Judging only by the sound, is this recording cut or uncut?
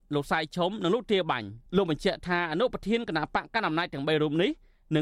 cut